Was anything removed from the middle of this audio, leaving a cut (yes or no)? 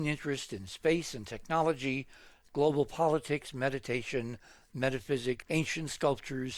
yes